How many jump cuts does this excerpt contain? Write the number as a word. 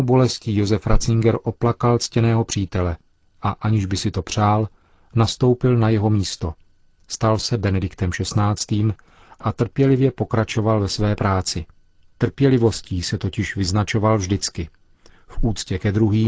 one